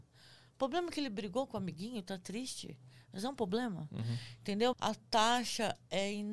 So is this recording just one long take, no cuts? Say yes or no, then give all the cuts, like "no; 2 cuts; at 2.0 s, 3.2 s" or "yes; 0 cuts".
no; 1 cut; at 4.7 s